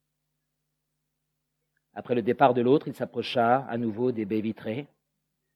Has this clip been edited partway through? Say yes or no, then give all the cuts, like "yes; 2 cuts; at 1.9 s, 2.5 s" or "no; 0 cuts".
no; 0 cuts